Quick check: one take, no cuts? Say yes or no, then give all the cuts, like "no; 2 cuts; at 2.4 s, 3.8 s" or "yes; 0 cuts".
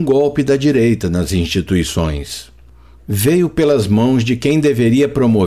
yes; 0 cuts